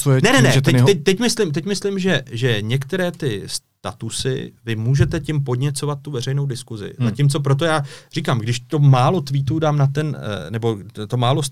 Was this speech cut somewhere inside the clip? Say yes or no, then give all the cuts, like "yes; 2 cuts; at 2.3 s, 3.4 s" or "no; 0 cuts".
no; 0 cuts